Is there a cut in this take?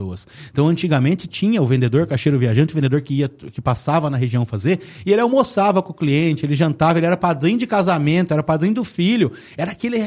no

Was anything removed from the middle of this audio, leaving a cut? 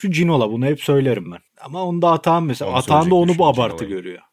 yes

